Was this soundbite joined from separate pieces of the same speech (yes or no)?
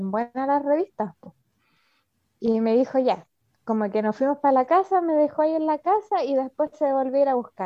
no